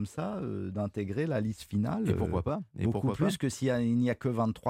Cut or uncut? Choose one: uncut